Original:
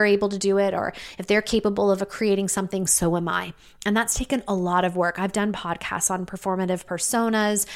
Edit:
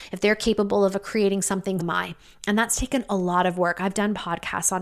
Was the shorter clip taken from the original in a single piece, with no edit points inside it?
no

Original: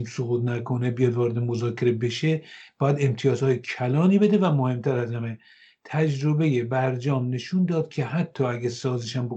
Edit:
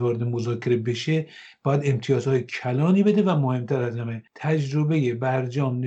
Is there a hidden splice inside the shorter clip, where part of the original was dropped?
yes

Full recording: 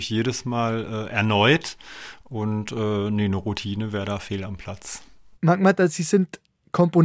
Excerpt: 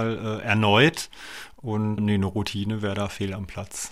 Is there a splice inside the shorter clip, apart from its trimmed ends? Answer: yes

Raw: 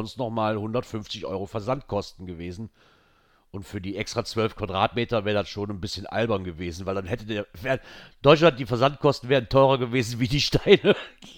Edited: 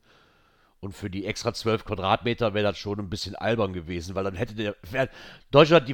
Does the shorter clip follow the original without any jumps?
yes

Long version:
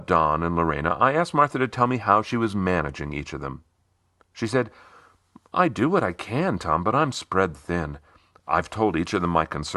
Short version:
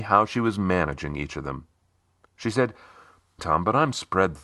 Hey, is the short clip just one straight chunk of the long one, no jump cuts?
no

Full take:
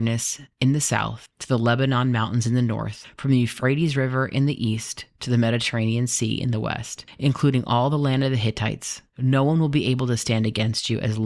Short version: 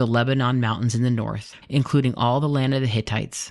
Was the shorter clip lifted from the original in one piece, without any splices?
no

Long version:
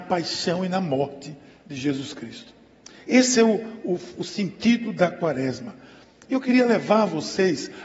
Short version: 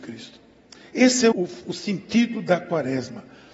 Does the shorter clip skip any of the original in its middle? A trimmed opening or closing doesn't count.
yes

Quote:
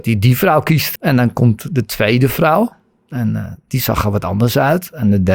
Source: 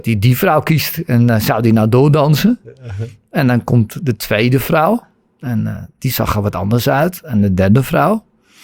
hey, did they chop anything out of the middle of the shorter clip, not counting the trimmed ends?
yes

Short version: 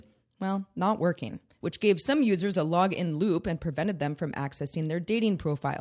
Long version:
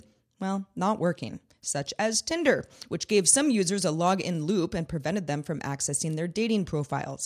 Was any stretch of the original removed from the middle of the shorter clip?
yes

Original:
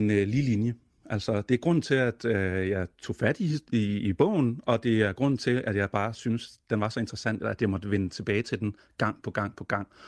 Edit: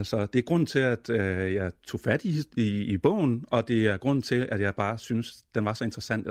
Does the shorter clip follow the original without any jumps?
yes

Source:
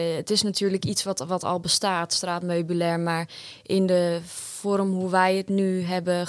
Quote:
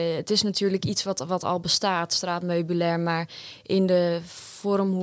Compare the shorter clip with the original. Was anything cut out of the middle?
no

